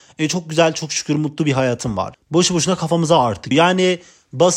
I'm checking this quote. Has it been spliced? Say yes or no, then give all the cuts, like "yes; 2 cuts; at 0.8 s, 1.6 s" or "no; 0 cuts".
yes; 2 cuts; at 2.1 s, 3.5 s